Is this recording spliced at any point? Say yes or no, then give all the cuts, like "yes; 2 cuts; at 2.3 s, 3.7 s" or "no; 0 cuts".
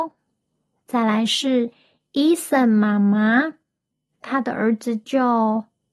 no; 0 cuts